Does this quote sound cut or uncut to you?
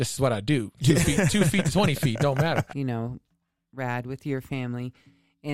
cut